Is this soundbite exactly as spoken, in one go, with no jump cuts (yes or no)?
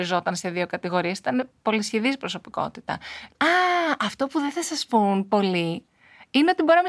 no